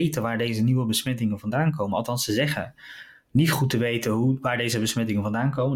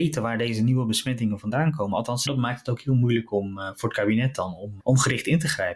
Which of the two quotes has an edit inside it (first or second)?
second